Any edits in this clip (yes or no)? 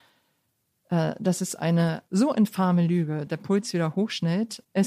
yes